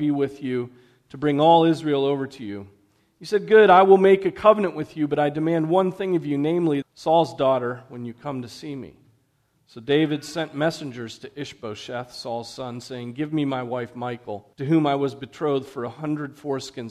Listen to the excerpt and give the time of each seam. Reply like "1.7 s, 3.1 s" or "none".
6.8 s, 14.5 s